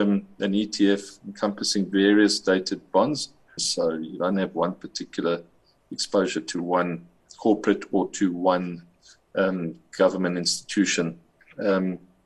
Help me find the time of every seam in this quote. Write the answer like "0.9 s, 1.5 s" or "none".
3.6 s, 7.3 s